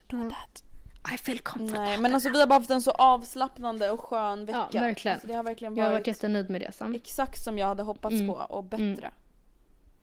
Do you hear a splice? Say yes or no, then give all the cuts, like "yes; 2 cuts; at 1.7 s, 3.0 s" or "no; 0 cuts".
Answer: no; 0 cuts